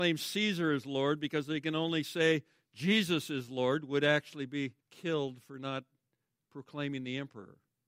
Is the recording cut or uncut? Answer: cut